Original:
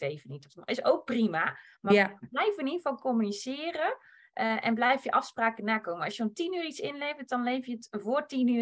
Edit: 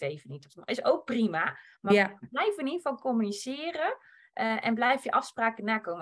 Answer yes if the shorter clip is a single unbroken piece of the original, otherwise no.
yes